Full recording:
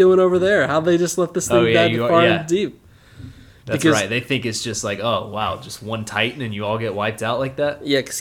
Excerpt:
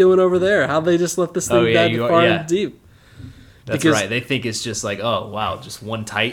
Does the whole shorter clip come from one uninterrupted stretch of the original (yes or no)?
yes